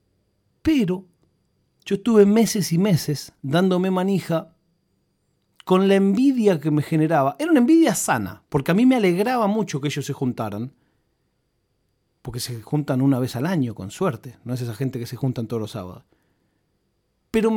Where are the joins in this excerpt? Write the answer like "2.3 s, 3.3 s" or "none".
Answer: 3.4 s